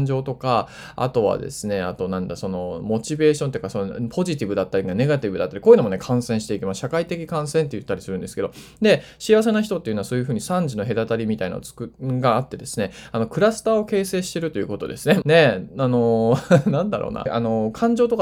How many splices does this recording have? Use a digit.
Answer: 2